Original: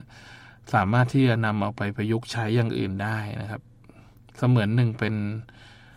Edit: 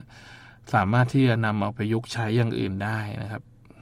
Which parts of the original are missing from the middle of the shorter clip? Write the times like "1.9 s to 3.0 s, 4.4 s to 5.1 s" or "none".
1.8 s to 1.9 s